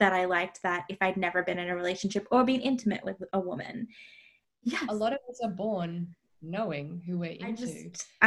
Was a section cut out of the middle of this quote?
yes; 1 cut; at 4.4 s

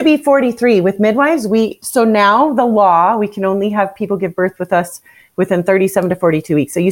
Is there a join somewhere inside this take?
no; 0 cuts

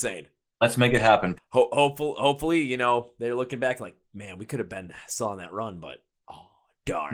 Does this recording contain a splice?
yes; 1 cut; at 1.4 s

